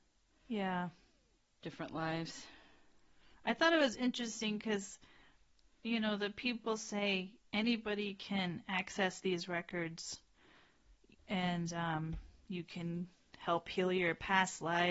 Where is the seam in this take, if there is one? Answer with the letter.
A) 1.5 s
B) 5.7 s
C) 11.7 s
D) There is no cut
D